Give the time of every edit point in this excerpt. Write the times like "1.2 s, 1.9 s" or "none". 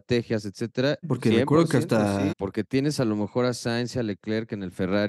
1.0 s, 2.3 s